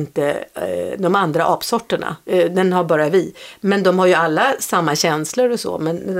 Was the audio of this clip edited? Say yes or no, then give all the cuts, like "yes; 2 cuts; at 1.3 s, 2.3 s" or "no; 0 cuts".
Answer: yes; 1 cut; at 2.2 s